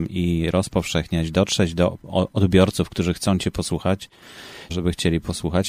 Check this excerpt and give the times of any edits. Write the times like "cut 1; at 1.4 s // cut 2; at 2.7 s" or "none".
cut 1; at 4.7 s